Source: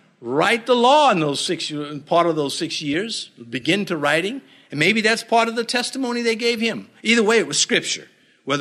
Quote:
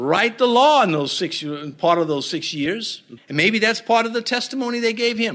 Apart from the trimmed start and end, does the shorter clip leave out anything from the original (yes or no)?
yes